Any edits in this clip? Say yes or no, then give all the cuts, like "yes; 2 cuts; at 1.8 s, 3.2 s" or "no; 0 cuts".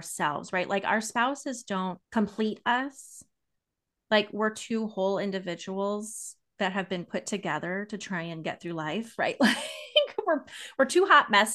yes; 1 cut; at 2.0 s